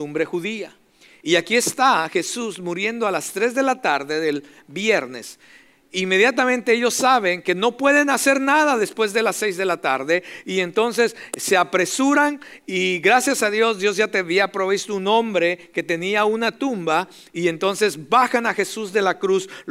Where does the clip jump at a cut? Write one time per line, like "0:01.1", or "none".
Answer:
none